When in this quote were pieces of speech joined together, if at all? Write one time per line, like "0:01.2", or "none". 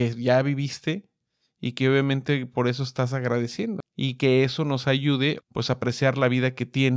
0:03.8
0:05.4